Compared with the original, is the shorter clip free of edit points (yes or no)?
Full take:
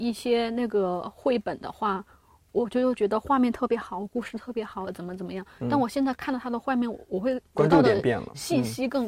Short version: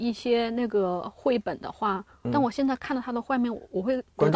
no